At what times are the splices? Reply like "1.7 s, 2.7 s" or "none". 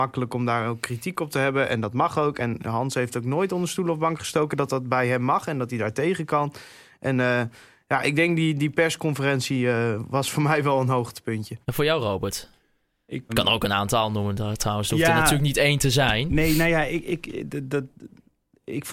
11.6 s, 13.3 s